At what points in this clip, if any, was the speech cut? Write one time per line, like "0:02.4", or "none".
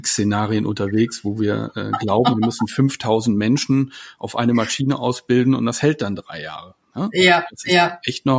none

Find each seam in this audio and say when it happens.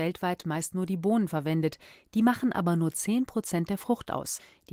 none

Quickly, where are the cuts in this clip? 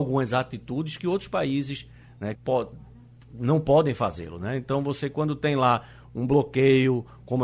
0:02.3

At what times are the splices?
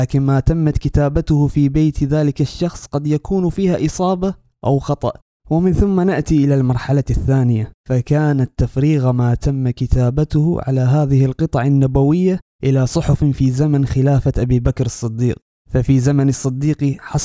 0:07.8

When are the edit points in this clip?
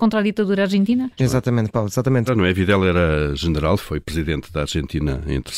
0:01.2
0:02.3
0:03.8

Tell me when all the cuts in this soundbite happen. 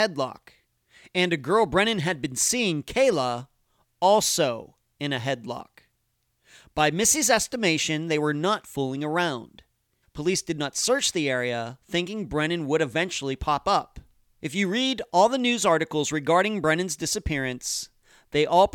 0:10.0
0:14.4

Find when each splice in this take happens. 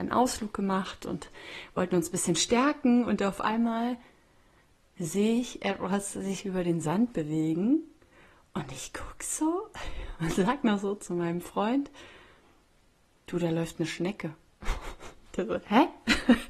none

